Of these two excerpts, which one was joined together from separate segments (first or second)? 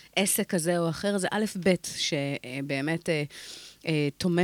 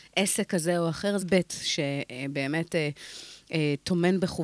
second